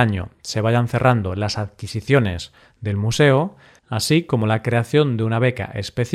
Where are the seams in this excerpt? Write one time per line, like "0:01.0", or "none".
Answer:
0:03.8